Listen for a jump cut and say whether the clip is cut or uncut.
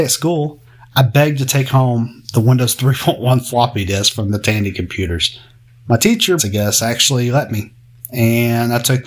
cut